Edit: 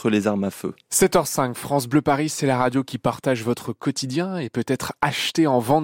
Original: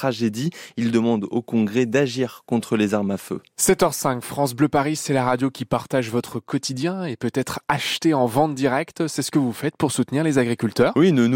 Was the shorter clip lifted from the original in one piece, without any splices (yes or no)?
yes